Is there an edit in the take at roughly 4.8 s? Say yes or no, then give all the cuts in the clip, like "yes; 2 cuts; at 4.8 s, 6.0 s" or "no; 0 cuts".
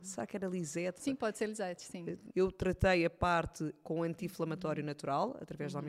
no; 2 cuts; at 1.0 s, 2.3 s